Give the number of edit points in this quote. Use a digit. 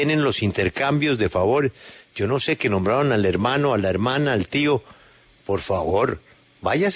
0